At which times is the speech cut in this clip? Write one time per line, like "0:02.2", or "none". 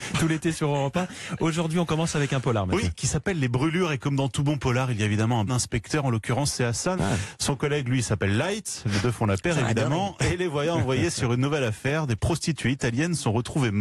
0:05.5
0:07.0